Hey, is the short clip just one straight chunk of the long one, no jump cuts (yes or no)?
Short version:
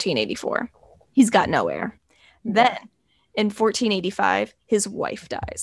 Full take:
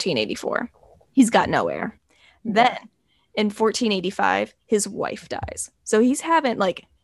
yes